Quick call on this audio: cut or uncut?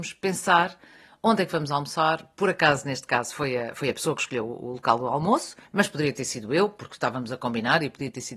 cut